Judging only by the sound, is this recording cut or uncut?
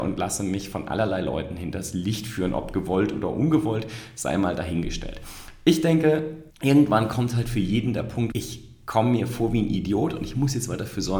cut